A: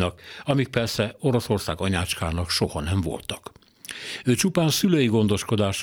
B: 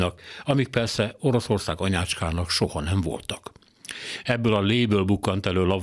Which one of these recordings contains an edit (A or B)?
B